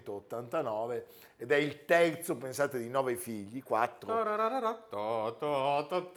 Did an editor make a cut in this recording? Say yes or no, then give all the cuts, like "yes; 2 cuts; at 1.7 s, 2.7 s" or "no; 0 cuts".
no; 0 cuts